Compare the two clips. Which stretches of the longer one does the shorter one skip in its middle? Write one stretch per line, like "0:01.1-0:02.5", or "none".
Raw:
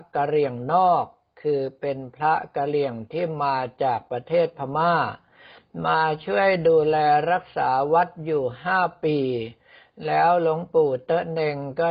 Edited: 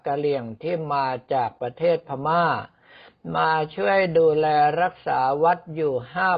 none